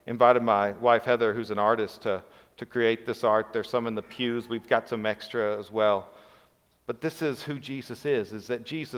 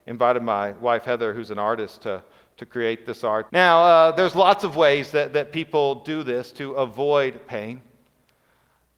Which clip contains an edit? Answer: second; 1 cut; at 3.5 s

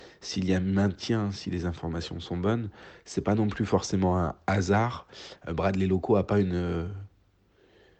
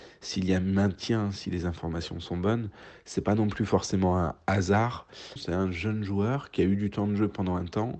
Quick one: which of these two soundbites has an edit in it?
second; 1 cut; at 5.4 s

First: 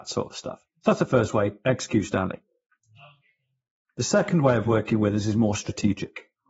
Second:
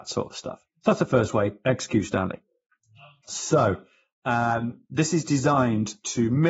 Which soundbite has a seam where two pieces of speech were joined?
second; 1 cut; at 3.2 s

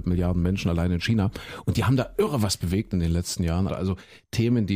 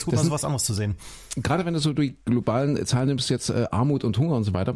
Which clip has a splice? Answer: first; 1 cut; at 3.7 s

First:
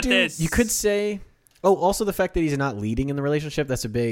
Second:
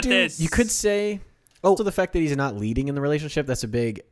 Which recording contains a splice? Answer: second; 1 cut; at 1.8 s

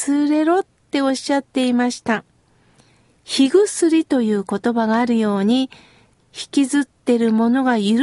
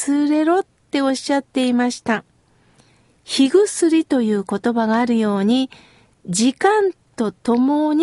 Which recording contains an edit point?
first; 1 cut; at 6.2 s

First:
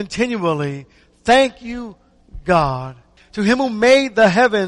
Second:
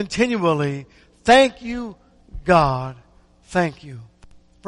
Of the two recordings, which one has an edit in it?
first; 1 cut; at 3.2 s

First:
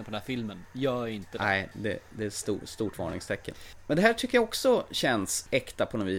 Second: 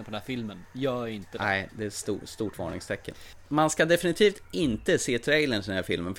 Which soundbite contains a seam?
second; 2 cuts; at 1.7 s, 3.4 s

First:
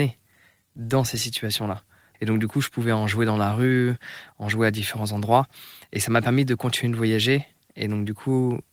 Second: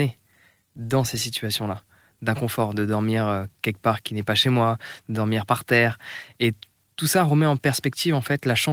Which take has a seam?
first; 1 cut; at 2.1 s

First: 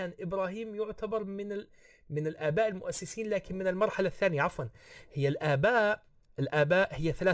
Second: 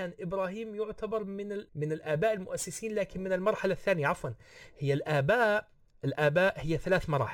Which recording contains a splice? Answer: second; 1 cut; at 1.7 s

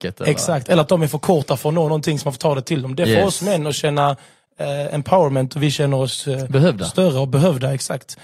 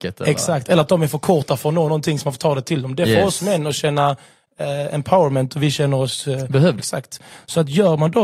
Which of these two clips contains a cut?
second; 1 cut; at 6.8 s

